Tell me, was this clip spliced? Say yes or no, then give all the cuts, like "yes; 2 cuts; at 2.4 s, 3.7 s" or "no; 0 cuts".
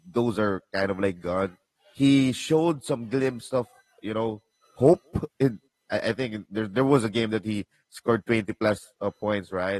no; 0 cuts